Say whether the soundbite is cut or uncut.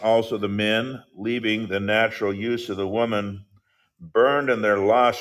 uncut